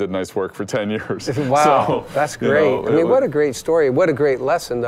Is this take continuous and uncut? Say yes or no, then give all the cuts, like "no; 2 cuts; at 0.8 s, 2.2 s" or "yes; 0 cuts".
yes; 0 cuts